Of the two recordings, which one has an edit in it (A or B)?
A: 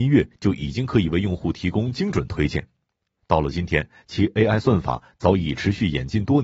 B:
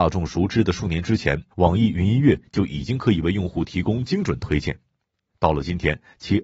B